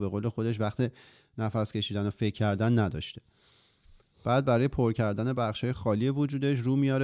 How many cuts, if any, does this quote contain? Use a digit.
0